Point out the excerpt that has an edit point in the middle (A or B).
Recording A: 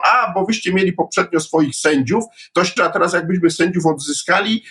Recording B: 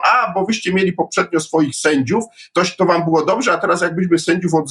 A